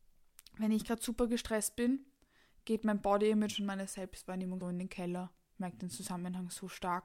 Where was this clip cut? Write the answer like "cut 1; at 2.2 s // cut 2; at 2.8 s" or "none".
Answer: cut 1; at 4.6 s